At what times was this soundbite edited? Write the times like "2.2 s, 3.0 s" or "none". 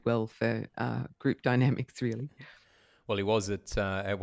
none